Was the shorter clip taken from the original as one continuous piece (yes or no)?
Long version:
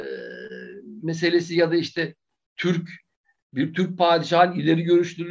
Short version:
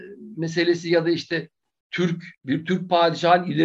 no